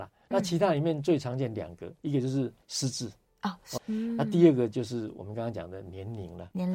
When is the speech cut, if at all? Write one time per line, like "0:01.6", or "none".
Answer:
0:02.6
0:03.8